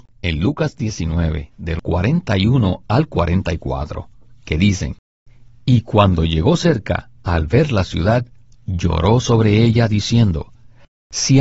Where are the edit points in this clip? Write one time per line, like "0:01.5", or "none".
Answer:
none